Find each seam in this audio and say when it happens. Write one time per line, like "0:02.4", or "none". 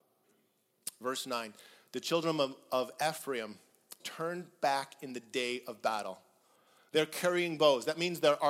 0:04.0